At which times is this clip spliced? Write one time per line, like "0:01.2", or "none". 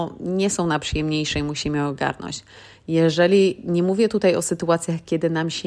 none